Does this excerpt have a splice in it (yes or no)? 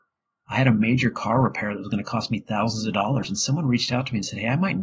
no